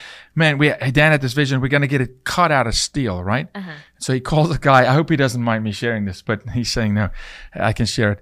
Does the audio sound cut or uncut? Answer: uncut